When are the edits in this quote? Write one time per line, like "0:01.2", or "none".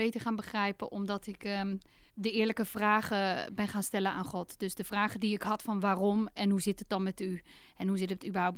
0:02.1